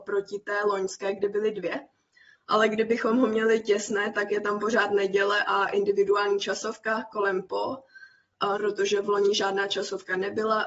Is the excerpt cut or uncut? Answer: cut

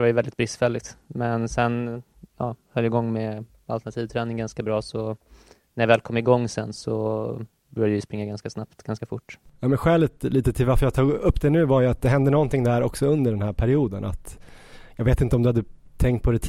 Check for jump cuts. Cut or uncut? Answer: uncut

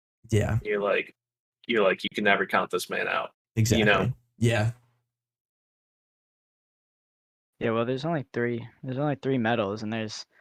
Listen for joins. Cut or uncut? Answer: uncut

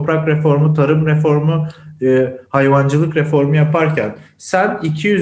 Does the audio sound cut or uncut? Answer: uncut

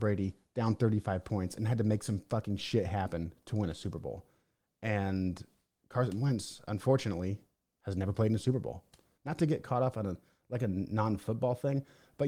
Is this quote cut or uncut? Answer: cut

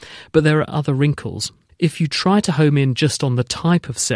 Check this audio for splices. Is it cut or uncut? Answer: cut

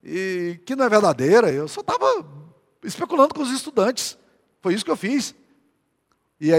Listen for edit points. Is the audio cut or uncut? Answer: uncut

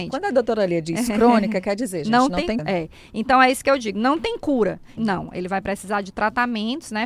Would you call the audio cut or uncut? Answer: cut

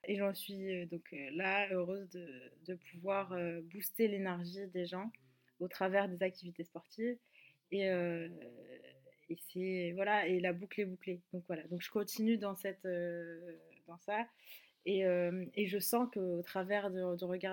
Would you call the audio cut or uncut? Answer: uncut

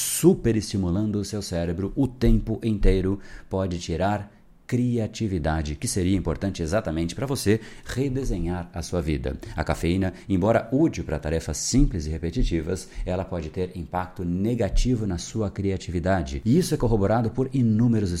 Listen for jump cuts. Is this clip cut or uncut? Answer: uncut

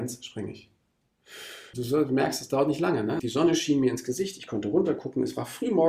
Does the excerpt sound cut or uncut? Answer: cut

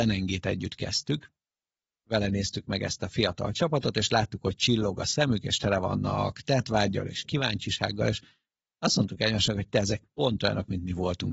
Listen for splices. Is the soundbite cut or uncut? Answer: uncut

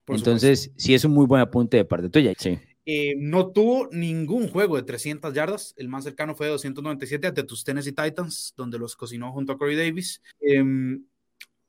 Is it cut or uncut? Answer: cut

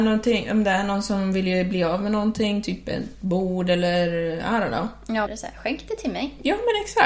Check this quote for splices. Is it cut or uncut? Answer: cut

